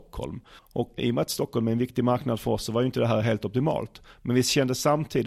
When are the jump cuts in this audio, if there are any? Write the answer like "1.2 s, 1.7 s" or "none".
1.0 s